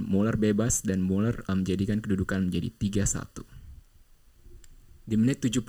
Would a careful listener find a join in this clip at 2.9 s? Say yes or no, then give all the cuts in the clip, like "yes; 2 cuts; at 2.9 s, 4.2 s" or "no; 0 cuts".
no; 1 cut; at 1.5 s